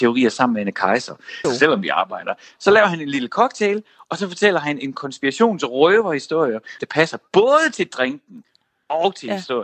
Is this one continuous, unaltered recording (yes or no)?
no